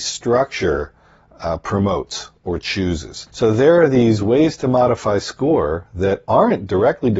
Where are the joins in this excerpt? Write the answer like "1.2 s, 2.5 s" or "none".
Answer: 3.3 s